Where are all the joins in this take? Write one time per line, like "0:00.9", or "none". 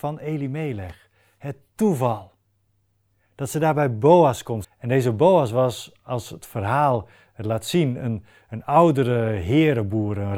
0:04.6